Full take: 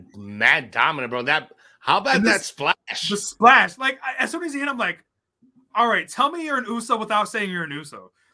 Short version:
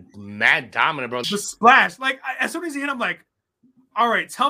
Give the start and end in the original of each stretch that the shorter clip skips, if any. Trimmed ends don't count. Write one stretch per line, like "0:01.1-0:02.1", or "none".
0:01.2-0:03.0